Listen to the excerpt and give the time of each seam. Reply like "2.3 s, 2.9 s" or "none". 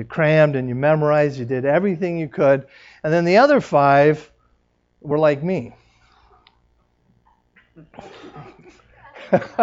none